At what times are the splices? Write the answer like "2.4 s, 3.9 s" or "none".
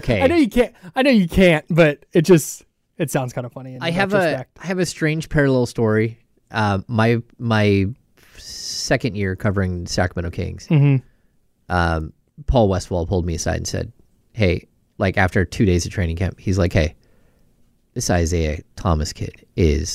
none